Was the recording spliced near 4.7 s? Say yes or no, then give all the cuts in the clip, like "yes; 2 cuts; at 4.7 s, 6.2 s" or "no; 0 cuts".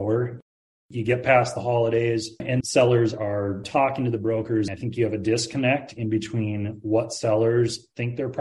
yes; 2 cuts; at 2.6 s, 4.7 s